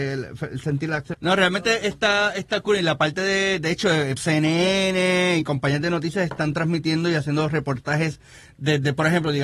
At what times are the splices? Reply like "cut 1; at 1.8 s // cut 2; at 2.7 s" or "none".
cut 1; at 1.1 s // cut 2; at 4.2 s